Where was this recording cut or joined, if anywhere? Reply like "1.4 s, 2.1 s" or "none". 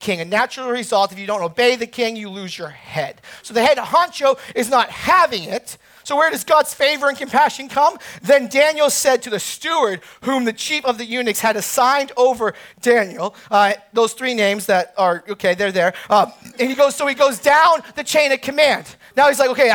none